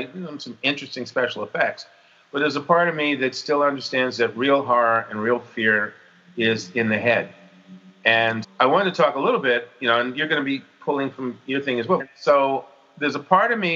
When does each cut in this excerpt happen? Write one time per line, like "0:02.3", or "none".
0:08.4
0:12.0